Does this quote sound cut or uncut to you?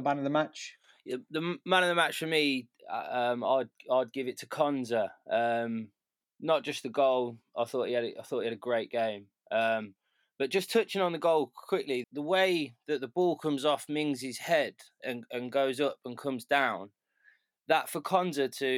cut